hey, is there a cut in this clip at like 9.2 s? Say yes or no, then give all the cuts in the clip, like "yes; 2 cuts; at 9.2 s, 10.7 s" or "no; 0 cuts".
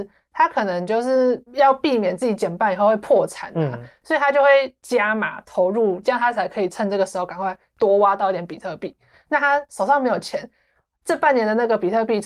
yes; 3 cuts; at 1.5 s, 6.0 s, 9.2 s